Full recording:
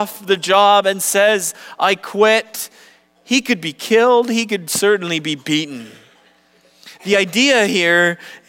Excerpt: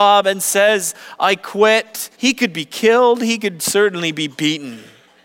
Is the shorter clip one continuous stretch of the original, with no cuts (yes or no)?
no